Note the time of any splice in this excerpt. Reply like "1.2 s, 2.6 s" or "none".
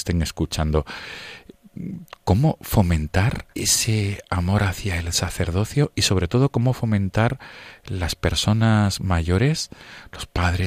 3.5 s